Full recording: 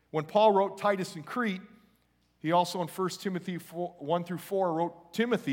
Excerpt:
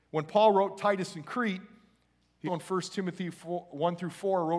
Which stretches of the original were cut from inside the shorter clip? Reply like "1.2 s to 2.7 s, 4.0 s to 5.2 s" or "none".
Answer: 2.5 s to 2.7 s